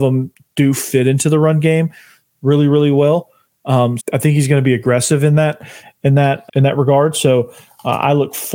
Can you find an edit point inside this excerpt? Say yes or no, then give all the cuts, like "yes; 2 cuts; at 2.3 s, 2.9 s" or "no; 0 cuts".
yes; 2 cuts; at 4.0 s, 6.5 s